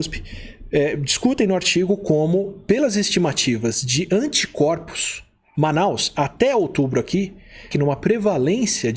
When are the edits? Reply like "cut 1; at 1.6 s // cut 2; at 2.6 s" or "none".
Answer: cut 1; at 5.5 s // cut 2; at 7.7 s

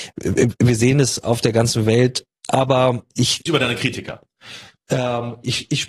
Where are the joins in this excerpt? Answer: cut 1; at 2.4 s // cut 2; at 3.5 s

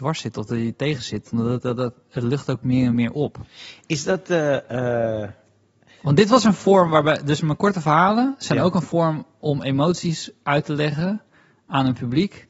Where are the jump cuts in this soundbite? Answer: none

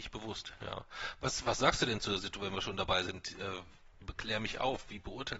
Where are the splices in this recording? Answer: none

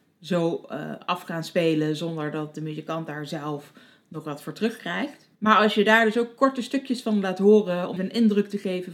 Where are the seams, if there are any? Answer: cut 1; at 5.3 s // cut 2; at 8.0 s

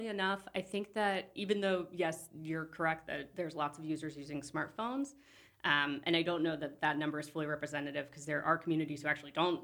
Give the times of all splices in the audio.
none

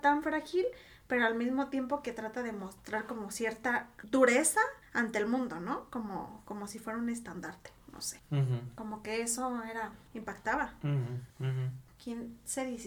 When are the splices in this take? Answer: cut 1; at 12.0 s

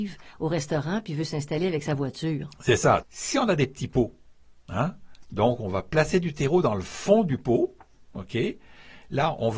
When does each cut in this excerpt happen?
cut 1; at 3.0 s

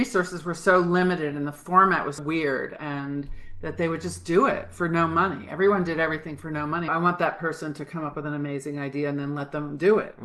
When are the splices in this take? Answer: cut 1; at 2.2 s // cut 2; at 6.9 s

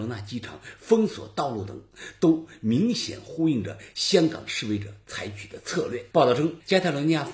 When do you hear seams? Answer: cut 1; at 6.1 s

